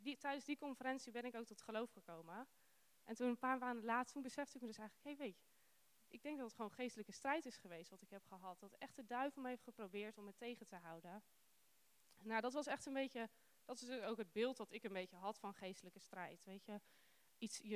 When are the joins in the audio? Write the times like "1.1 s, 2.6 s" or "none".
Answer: none